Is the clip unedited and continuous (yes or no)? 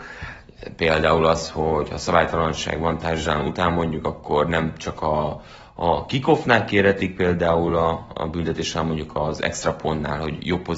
yes